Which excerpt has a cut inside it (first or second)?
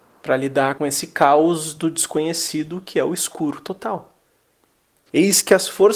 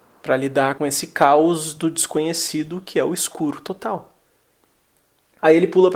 first